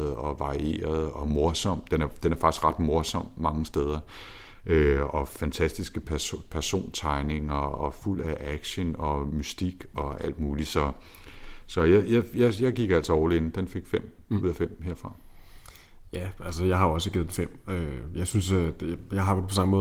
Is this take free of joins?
yes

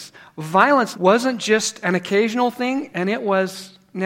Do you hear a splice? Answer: yes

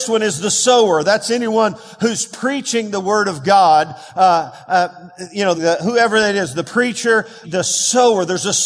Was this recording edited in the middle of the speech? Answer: yes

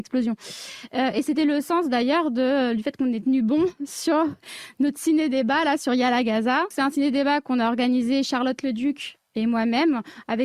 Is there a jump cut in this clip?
no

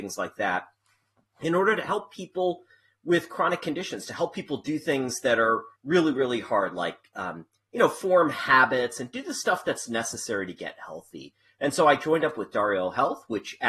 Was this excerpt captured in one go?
no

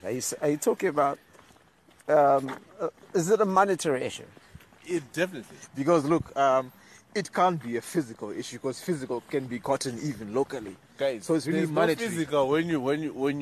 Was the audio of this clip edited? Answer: yes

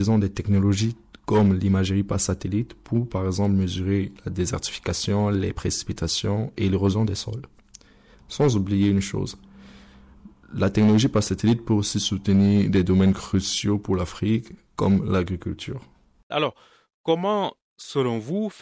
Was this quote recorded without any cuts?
no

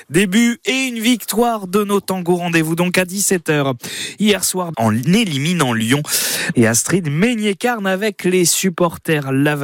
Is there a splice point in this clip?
yes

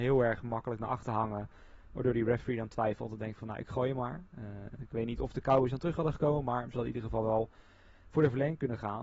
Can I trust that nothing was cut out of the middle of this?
yes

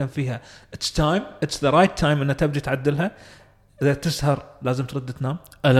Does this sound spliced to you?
no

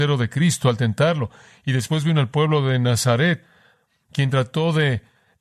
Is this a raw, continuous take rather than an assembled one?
yes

